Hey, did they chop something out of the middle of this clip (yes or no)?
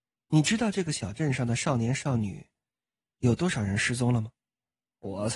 no